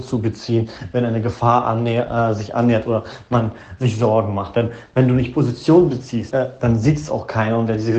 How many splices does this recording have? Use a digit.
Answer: 1